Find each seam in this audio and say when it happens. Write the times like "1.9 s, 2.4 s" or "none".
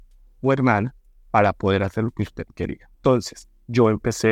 2.9 s